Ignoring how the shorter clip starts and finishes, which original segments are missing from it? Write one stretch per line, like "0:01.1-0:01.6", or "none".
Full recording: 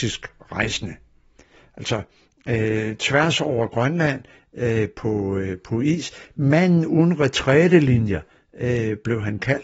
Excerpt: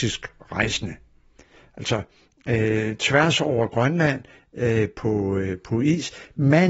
none